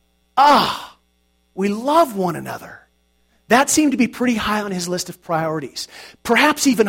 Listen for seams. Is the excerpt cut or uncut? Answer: uncut